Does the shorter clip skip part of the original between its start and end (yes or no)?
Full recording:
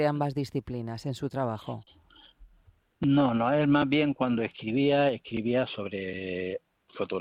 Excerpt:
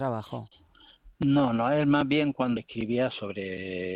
yes